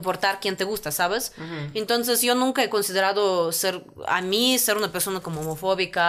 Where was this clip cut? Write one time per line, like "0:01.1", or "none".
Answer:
none